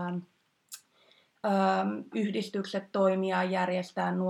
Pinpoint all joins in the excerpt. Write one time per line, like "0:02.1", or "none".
0:02.1